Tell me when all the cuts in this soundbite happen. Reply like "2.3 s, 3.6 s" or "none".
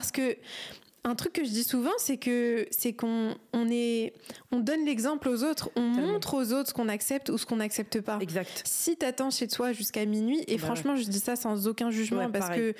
none